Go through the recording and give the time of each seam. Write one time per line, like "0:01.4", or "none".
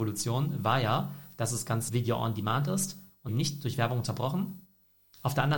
0:01.9
0:03.3